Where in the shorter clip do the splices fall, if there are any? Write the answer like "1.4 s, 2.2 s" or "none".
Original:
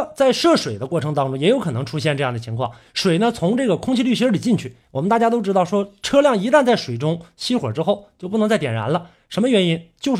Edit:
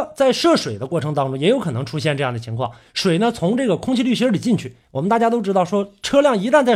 none

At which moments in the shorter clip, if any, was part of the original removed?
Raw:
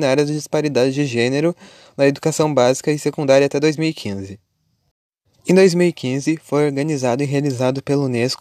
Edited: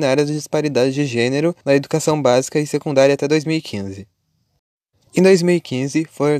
1.6 s

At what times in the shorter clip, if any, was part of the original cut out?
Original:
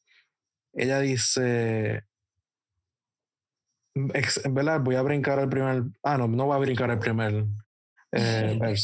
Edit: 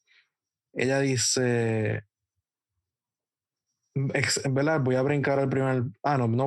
none

